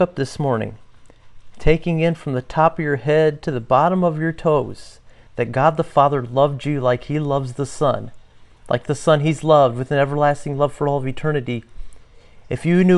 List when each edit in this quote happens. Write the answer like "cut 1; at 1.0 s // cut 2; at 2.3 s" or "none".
none